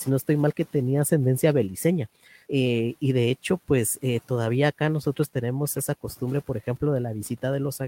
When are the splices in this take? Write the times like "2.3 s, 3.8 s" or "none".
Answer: 2.5 s

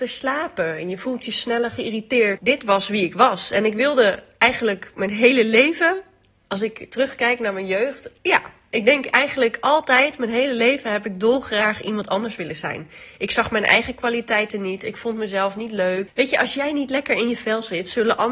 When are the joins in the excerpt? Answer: 2.4 s, 8.2 s, 16.1 s

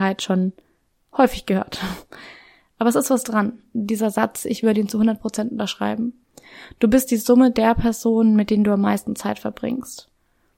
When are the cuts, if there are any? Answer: 3.7 s

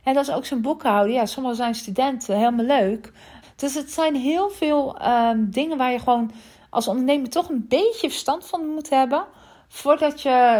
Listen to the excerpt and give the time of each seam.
3.4 s

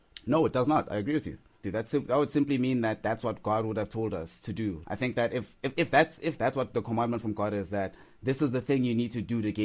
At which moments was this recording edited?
1.6 s, 4.8 s

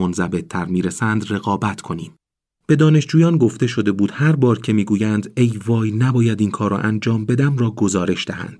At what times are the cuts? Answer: 2.6 s

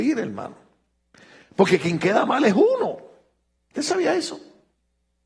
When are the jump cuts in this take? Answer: 3.6 s

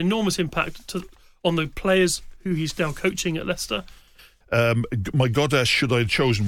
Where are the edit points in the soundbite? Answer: 4.4 s

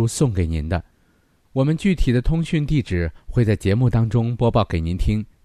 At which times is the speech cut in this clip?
none

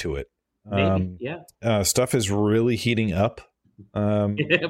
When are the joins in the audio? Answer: none

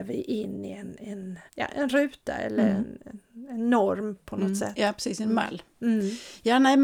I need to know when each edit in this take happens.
1.5 s

